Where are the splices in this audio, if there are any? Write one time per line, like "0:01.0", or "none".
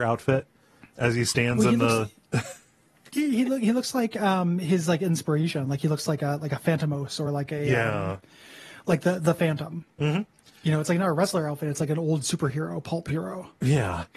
none